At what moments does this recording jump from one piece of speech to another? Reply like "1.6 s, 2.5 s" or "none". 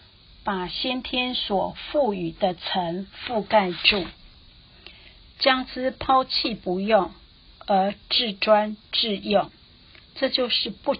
none